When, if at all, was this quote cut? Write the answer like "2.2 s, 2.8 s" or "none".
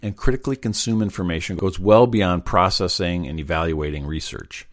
none